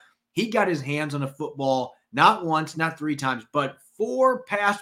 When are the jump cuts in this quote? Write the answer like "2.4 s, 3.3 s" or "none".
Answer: 2.7 s